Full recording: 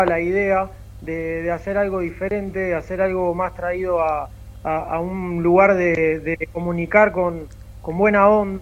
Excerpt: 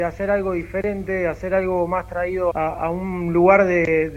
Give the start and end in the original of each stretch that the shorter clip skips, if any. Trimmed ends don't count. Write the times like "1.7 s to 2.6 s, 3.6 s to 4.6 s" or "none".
4.0 s to 4.6 s

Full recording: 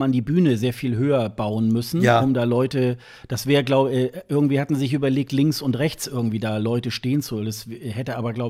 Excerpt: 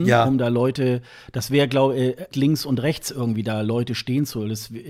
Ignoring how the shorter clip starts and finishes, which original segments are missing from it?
4.3 s to 5.3 s

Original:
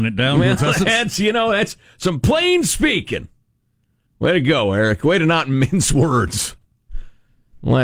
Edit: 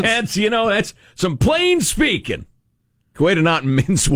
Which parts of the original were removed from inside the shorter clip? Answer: 4.0 s to 5.0 s

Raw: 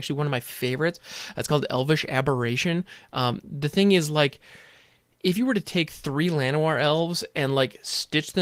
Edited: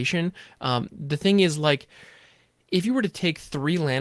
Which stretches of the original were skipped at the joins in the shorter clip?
none

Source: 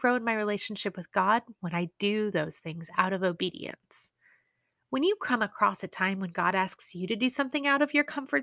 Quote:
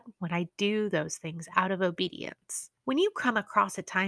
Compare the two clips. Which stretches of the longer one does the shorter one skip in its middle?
4.2 s to 4.8 s

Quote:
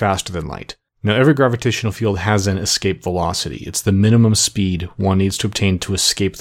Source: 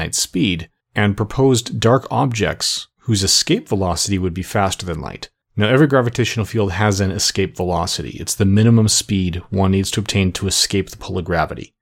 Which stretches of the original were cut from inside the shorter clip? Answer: none

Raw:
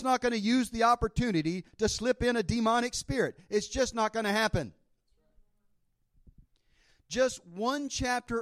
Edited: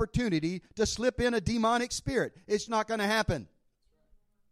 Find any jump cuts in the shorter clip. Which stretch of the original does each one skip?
3.7 s to 3.9 s

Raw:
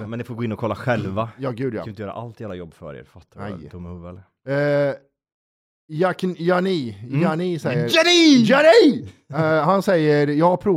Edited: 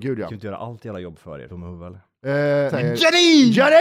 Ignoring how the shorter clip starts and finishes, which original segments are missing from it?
3.0 s to 3.7 s, 4.9 s to 7.6 s

